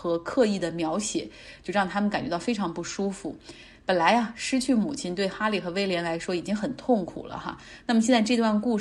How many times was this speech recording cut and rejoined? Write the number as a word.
zero